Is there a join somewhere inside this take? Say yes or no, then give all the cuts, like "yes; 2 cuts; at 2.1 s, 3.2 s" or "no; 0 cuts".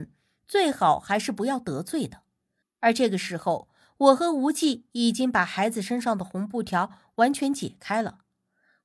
yes; 1 cut; at 2.6 s